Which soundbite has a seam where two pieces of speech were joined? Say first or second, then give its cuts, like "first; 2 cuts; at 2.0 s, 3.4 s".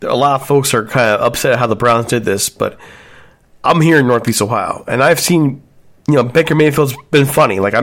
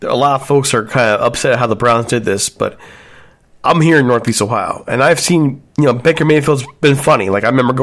second; 1 cut; at 5.7 s